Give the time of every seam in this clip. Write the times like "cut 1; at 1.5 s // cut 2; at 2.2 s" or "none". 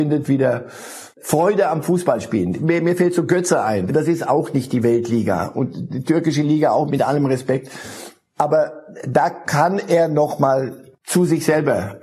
cut 1; at 3.9 s // cut 2; at 6.9 s